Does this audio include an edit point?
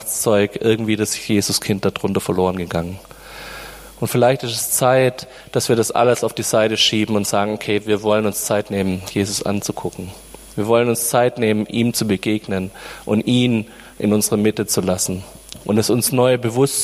no; 0 cuts

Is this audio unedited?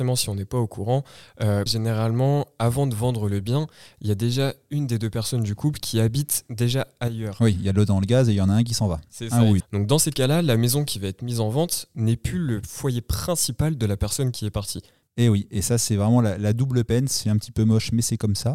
no; 3 cuts; at 1.7 s, 9.6 s, 15.0 s

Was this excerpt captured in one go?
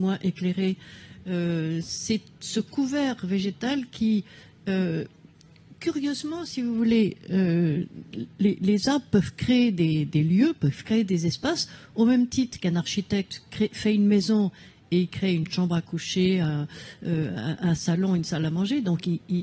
yes; 0 cuts

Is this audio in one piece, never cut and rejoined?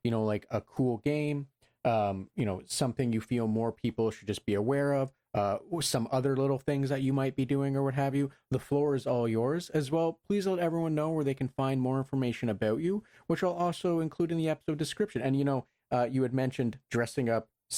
yes; 0 cuts

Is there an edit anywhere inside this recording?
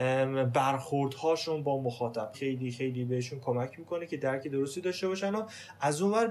yes; 1 cut; at 2.3 s

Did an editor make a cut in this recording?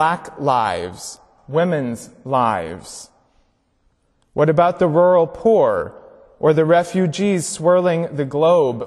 yes; 1 cut; at 1.4 s

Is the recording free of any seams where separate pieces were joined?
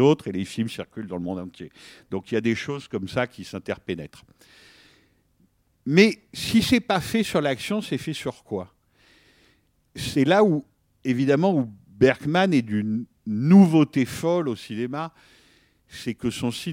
yes; 0 cuts

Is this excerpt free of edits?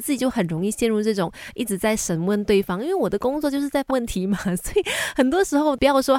no; 1 cut; at 3.9 s

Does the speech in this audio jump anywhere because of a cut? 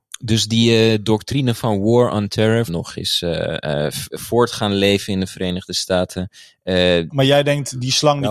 yes; 2 cuts; at 2.7 s, 7.1 s

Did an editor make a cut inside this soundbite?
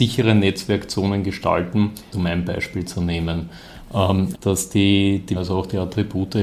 yes; 3 cuts; at 2.1 s, 4.3 s, 5.3 s

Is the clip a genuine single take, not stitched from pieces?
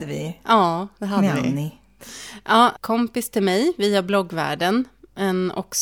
no; 1 cut; at 2.8 s

